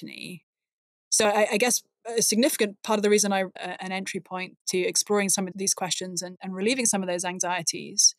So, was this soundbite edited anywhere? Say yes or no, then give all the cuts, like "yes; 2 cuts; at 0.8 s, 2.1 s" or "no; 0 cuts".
yes; 2 cuts; at 3.6 s, 5.5 s